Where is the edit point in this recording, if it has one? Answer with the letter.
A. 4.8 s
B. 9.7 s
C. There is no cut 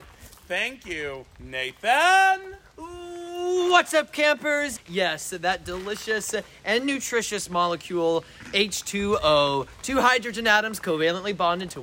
A